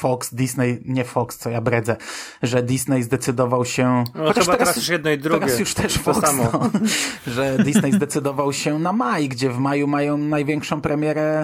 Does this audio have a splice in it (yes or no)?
no